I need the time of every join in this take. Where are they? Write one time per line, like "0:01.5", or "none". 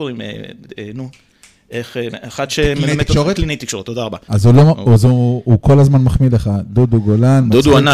0:04.3